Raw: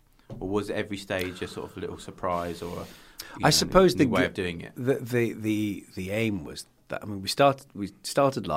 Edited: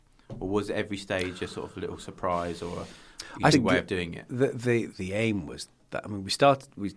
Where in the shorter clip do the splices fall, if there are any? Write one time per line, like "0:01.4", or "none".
0:03.5
0:04.9